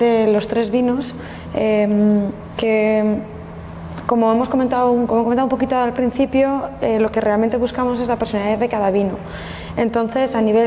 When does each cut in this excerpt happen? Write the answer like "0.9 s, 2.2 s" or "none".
none